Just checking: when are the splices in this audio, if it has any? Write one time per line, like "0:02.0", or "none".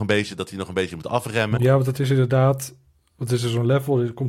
0:01.6